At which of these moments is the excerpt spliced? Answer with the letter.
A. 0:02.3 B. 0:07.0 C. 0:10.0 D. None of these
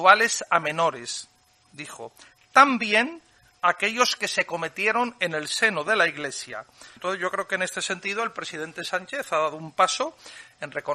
B